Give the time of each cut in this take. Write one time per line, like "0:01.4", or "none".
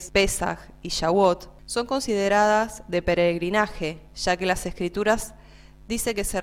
none